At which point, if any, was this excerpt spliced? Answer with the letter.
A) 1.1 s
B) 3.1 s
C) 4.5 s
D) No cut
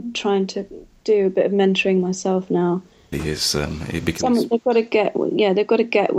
B